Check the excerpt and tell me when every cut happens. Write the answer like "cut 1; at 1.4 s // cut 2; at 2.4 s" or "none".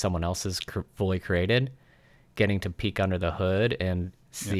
none